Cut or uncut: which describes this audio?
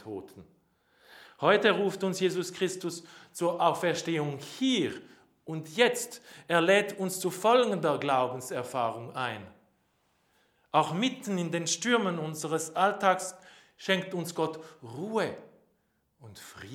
uncut